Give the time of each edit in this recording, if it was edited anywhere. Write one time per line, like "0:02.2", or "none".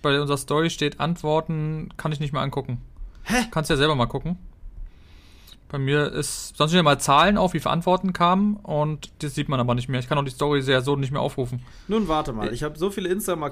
0:03.5

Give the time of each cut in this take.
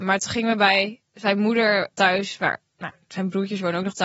0:01.9

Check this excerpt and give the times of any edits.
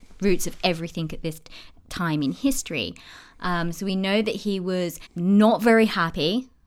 0:05.1

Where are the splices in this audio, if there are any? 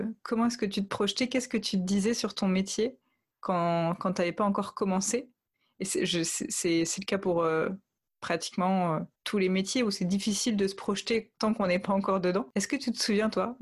0:09.1

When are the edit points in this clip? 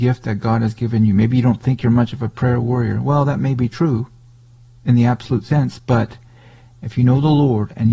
none

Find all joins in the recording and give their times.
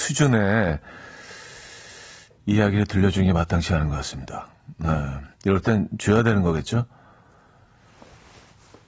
0:05.3

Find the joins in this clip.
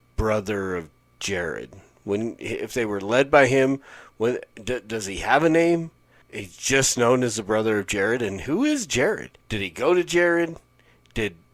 0:06.2
0:09.4

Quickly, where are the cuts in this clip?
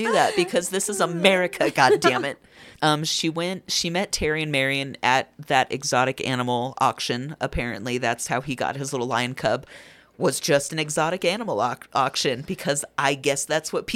0:02.8

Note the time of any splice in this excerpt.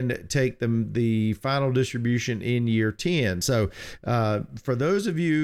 none

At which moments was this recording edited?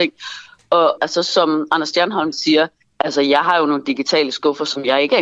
0:01.0
0:02.3

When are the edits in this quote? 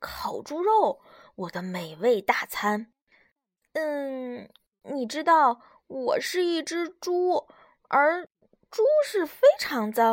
0:03.1

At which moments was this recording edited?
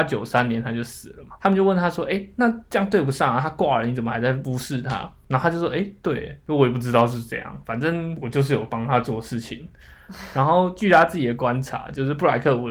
none

